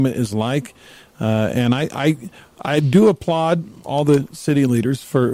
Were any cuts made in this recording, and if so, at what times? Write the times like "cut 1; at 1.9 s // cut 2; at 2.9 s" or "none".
none